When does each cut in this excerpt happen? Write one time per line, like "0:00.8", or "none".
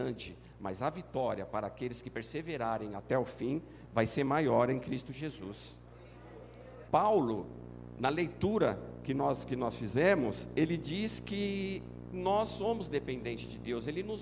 0:06.9